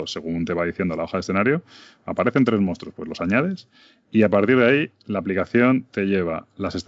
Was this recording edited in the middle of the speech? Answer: no; 0 cuts

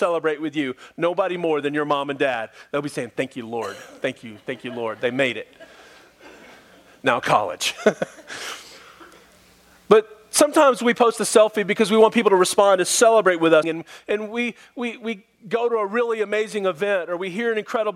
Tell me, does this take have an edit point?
yes; 1 cut; at 13.6 s

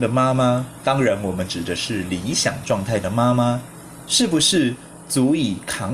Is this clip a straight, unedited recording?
yes; 0 cuts

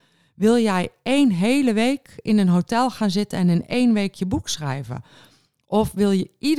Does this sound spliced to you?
no; 0 cuts

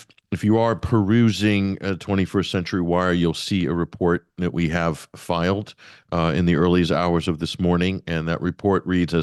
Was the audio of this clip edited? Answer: no; 0 cuts

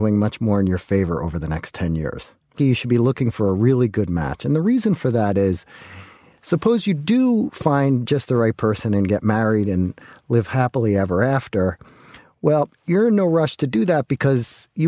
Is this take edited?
yes; 1 cut; at 2.6 s

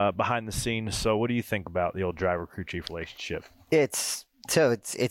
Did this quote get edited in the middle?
no; 0 cuts

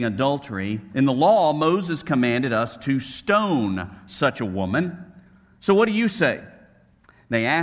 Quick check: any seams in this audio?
no; 0 cuts

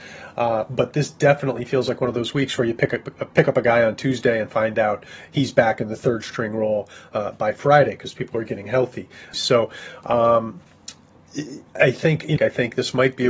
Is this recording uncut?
no; 2 cuts; at 9.3 s, 12.4 s

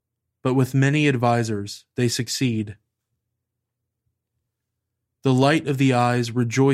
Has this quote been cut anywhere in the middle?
yes; 1 cut; at 5.0 s

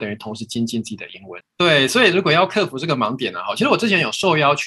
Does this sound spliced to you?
yes; 1 cut; at 1.4 s

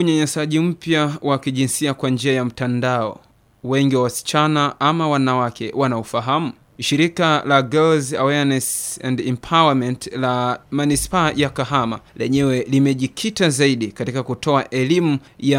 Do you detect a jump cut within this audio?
no; 0 cuts

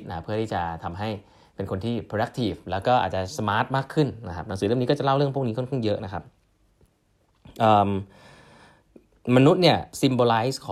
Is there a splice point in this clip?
no; 0 cuts

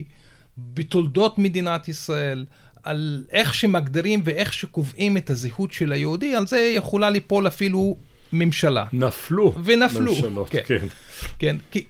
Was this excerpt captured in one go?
yes; 0 cuts

